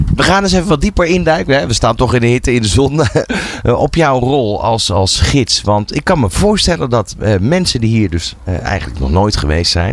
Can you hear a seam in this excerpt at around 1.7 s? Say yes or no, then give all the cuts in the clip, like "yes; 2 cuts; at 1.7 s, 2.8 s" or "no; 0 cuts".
no; 0 cuts